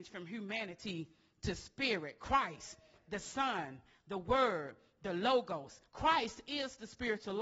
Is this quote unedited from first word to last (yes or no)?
no